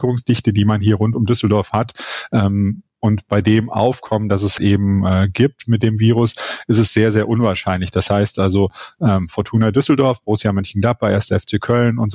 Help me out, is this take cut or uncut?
cut